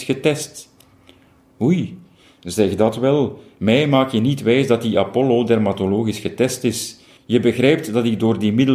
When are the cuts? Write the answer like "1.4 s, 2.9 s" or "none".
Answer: none